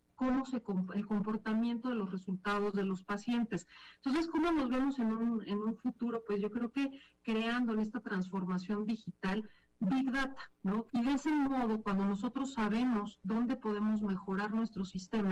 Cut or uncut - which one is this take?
cut